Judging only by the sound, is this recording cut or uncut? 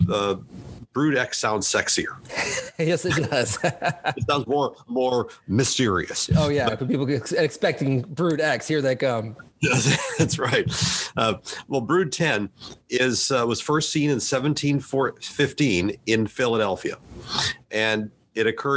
uncut